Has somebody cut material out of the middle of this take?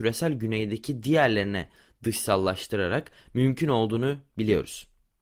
no; 0 cuts

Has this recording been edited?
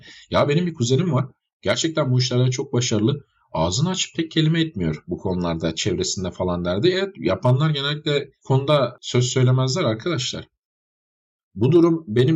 yes; 1 cut; at 11.4 s

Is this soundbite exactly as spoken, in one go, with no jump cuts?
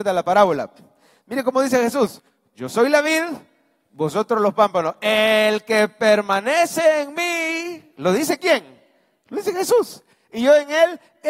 yes; 0 cuts

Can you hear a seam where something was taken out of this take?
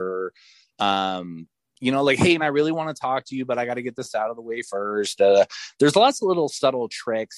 yes; 1 cut; at 2.4 s

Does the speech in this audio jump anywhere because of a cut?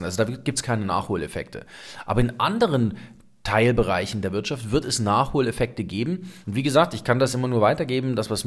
yes; 1 cut; at 6.4 s

